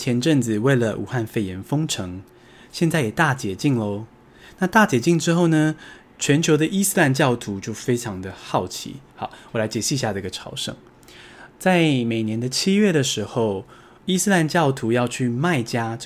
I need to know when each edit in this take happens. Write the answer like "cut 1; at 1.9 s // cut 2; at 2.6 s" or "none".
cut 1; at 9.1 s